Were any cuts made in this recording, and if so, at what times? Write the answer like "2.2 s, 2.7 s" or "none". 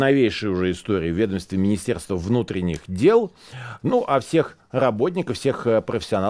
3.8 s